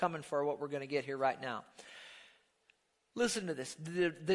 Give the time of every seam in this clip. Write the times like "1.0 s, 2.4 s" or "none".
none